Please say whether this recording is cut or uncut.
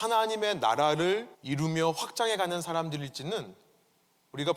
cut